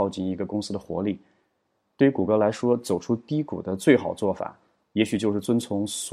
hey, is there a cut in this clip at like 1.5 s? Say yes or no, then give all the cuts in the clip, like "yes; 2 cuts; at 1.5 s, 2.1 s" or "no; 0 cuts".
no; 0 cuts